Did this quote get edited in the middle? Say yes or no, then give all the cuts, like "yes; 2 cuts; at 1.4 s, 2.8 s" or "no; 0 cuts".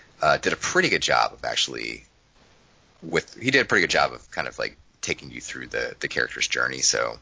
no; 0 cuts